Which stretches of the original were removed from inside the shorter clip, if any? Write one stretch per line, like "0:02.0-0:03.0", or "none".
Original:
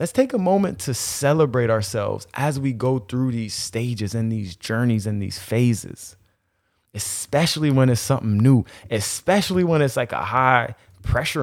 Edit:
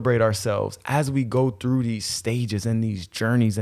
none